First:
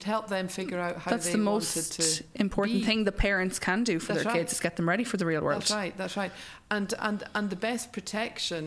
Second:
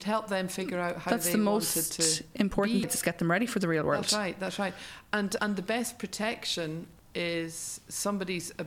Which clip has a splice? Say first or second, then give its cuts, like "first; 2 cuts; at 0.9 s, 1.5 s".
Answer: second; 2 cuts; at 2.8 s, 5.4 s